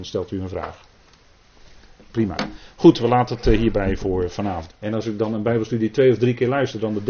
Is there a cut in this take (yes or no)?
yes